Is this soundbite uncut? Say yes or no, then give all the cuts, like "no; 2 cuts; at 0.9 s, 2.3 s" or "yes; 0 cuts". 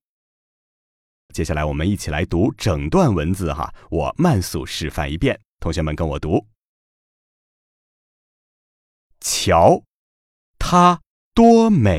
no; 1 cut; at 1.3 s